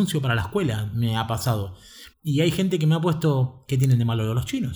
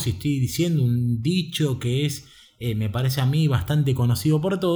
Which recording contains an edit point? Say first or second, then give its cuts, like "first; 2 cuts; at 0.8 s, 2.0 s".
first; 1 cut; at 2.1 s